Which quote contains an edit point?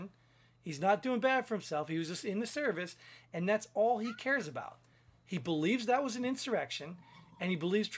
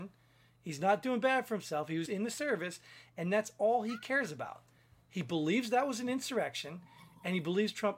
second; 1 cut; at 2.1 s

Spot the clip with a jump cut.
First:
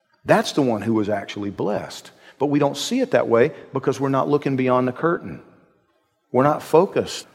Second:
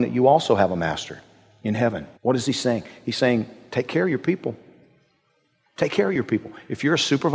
second; 1 cut; at 2.2 s

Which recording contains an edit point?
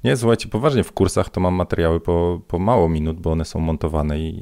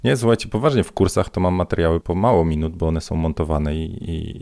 second; 1 cut; at 2.0 s

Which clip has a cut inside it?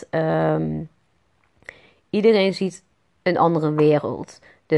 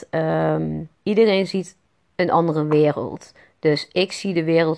second; 1 cut; at 0.9 s

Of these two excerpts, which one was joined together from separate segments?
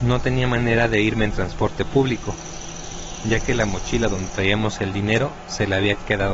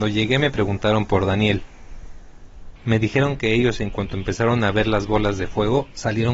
second; 1 cut; at 2.8 s

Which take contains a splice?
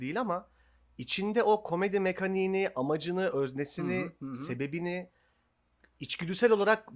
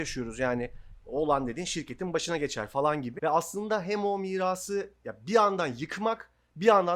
second; 1 cut; at 3.2 s

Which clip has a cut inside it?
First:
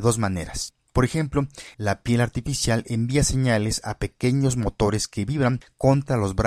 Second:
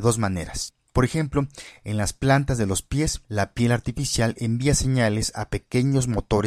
first; 1 cut; at 1.7 s

